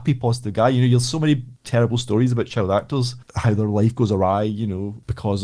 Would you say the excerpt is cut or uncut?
uncut